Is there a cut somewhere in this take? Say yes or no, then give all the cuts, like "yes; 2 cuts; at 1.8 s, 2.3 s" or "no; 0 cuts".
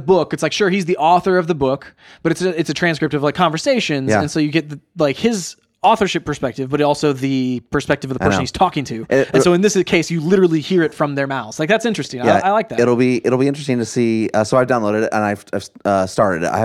no; 0 cuts